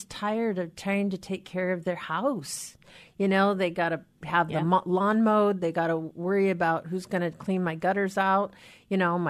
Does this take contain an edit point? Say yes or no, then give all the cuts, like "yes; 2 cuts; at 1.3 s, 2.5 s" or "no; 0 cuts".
no; 0 cuts